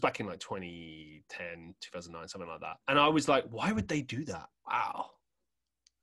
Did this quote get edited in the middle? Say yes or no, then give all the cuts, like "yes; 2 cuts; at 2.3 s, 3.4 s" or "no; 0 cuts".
yes; 2 cuts; at 2.8 s, 4.5 s